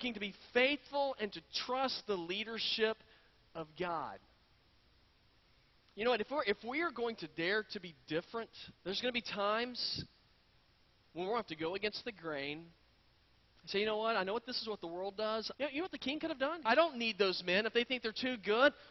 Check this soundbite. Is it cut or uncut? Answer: cut